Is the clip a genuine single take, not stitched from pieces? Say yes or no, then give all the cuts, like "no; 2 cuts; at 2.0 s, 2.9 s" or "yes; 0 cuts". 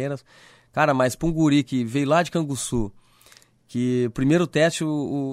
yes; 0 cuts